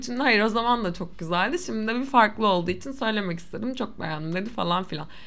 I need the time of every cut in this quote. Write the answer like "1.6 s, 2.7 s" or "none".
none